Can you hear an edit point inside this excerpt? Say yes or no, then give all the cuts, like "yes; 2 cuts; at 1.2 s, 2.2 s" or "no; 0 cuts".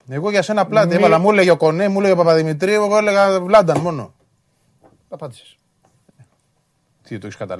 no; 0 cuts